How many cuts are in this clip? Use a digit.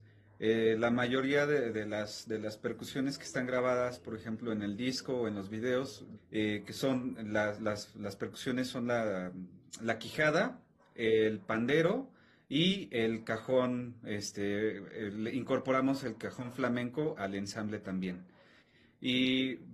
2